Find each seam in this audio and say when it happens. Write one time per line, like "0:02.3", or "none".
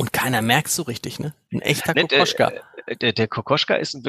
none